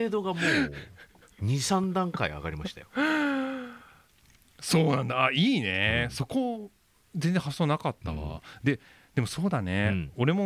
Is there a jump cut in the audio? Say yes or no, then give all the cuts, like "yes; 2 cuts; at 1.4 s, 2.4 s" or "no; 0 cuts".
no; 0 cuts